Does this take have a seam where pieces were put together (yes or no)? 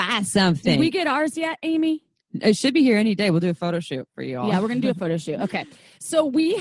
no